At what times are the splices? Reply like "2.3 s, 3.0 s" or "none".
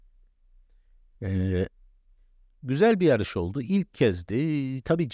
none